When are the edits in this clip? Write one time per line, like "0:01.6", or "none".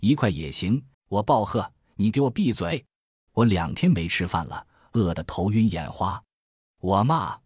0:00.9
0:03.3